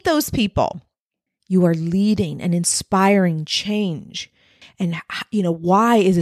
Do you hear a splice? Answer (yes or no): yes